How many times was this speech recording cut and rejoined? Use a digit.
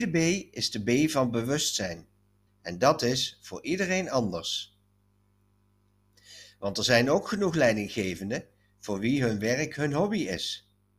1